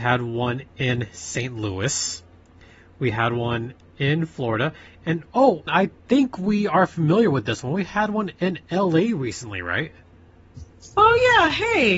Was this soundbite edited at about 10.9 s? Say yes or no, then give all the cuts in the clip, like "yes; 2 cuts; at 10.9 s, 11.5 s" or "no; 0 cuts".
no; 1 cut; at 5.7 s